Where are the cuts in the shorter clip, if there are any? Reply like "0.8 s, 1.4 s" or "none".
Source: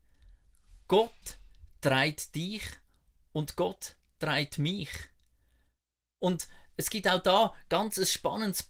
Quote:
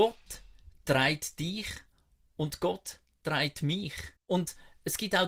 4.2 s

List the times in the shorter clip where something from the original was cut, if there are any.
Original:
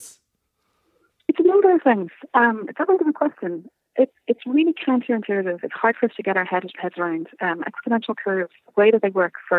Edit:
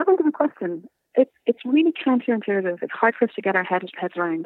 none

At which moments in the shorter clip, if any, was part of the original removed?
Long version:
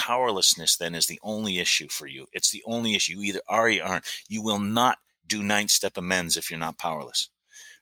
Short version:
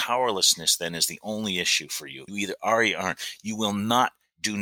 2.3 s

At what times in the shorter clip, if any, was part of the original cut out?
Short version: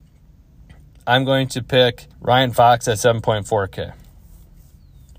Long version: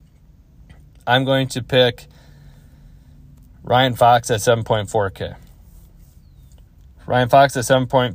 2.1 s

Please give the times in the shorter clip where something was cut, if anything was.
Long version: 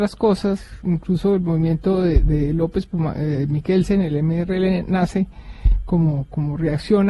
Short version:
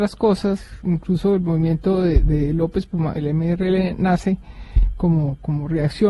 3.1 s

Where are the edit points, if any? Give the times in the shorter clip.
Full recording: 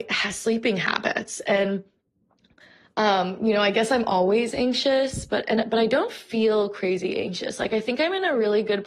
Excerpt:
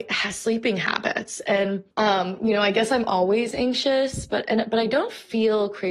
1.9 s

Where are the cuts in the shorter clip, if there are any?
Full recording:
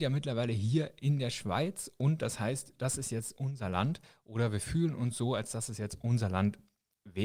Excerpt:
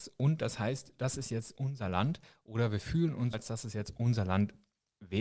3.3 s

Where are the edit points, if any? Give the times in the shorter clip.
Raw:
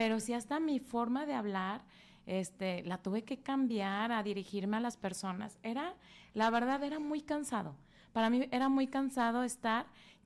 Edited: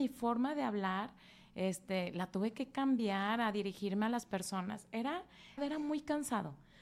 5.6 s

